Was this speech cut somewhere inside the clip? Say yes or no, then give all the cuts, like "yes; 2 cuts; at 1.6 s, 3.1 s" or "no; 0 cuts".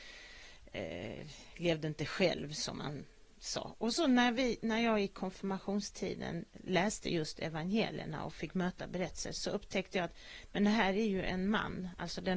no; 0 cuts